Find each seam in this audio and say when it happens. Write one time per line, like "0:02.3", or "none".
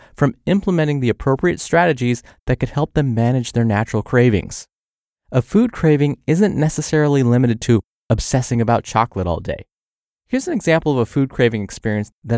none